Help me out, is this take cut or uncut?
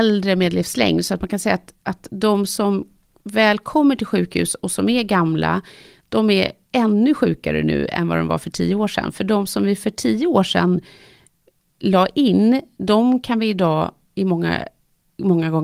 uncut